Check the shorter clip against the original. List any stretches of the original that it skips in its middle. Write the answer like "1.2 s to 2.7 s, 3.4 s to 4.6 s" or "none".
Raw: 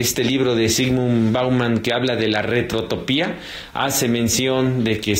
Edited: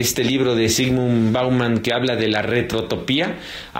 none